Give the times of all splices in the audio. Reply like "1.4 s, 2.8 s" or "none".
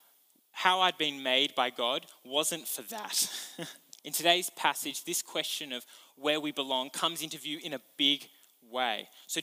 3.9 s